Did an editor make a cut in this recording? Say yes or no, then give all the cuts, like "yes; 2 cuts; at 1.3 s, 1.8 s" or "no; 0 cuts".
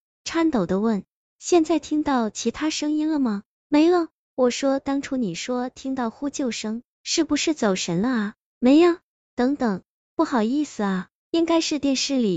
yes; 1 cut; at 11.2 s